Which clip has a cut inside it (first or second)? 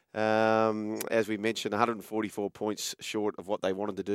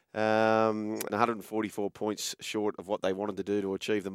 second